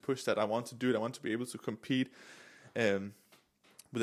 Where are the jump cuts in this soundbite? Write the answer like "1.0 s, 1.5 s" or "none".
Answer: none